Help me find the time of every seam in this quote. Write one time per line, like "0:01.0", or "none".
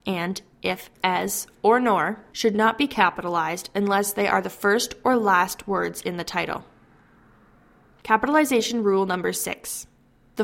none